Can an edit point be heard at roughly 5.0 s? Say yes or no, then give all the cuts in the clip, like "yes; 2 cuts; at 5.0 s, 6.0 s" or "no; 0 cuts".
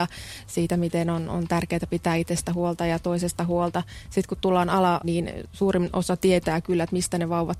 yes; 1 cut; at 5.0 s